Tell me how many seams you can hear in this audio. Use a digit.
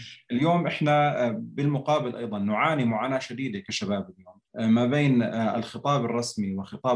1